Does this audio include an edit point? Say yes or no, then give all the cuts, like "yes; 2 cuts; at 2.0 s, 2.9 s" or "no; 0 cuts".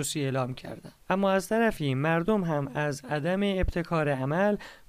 no; 0 cuts